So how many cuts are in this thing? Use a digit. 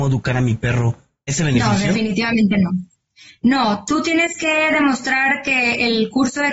1